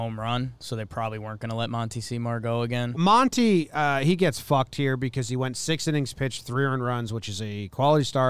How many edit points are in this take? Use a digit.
1